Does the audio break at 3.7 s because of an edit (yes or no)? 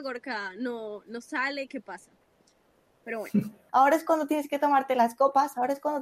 yes